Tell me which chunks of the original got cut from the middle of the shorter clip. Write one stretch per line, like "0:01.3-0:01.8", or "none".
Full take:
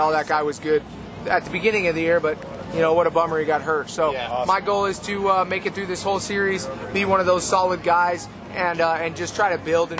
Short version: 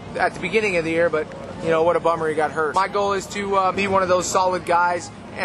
0:03.8-0:04.5
0:05.5-0:06.9